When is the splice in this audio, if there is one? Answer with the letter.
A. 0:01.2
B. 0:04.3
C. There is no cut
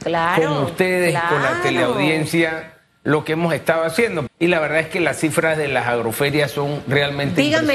B